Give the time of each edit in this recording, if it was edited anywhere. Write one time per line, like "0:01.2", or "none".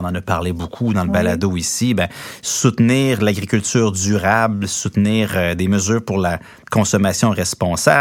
none